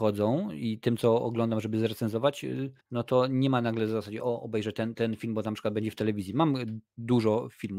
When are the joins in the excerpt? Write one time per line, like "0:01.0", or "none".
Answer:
0:02.8